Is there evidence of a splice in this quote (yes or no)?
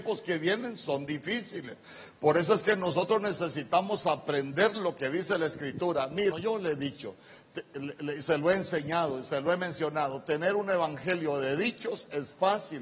yes